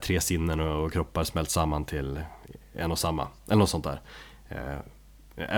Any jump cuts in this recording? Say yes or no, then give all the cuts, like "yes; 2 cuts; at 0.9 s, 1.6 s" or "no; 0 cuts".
no; 0 cuts